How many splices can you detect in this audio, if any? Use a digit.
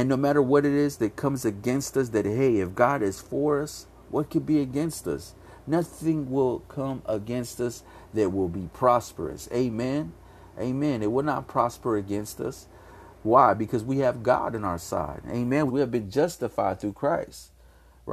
1